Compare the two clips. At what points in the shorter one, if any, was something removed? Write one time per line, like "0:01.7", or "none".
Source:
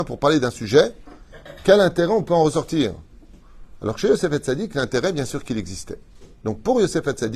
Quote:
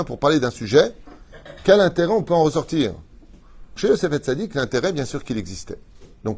0:03.8